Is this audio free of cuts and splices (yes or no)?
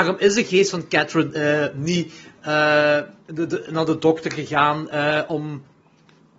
yes